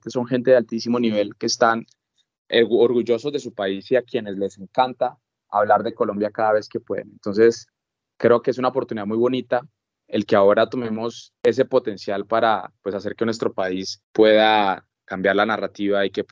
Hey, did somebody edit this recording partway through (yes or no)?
no